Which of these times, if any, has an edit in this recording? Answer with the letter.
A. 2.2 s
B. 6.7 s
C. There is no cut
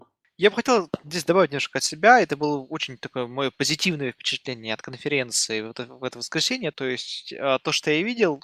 B